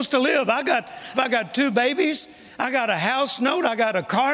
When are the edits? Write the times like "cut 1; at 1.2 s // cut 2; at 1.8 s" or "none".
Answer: cut 1; at 1.1 s